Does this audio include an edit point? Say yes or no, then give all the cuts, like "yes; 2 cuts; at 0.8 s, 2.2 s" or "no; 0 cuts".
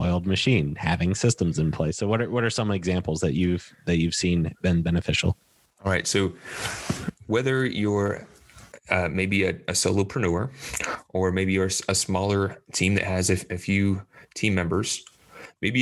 no; 0 cuts